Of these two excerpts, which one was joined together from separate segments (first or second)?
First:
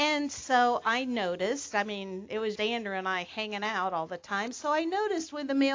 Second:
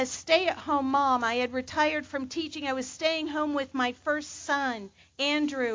first